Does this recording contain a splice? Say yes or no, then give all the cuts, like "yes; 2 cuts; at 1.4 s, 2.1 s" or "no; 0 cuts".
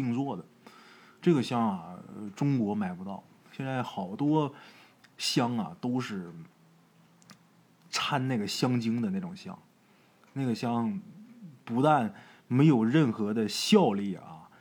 no; 0 cuts